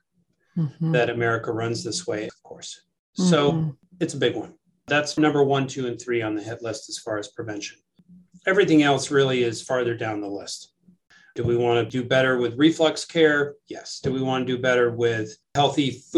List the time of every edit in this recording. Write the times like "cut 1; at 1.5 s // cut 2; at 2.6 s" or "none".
cut 1; at 2.3 s // cut 2; at 5.2 s